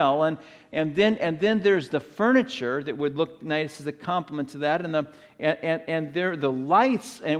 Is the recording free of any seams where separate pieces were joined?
yes; 0 cuts

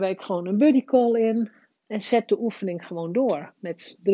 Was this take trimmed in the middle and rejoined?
yes; 1 cut; at 1.7 s

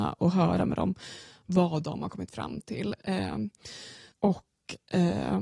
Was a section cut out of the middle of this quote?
yes; 1 cut; at 4.1 s

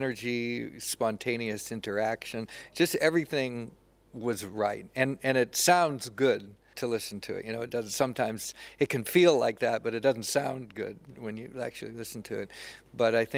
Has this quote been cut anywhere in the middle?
yes; 1 cut; at 6.7 s

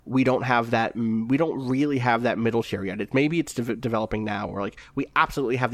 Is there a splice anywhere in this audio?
no; 0 cuts

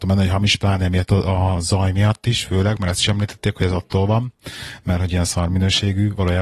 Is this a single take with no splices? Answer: yes; 0 cuts

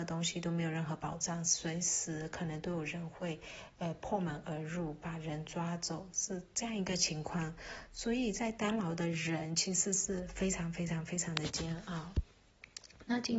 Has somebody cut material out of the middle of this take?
no; 0 cuts

